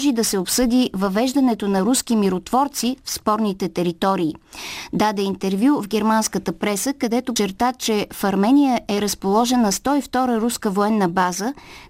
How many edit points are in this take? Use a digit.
1